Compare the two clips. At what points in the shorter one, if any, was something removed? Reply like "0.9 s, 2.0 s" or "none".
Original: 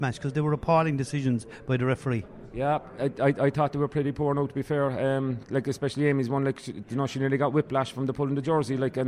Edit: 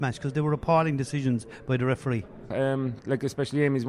2.5 s